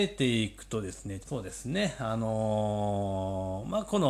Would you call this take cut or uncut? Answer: cut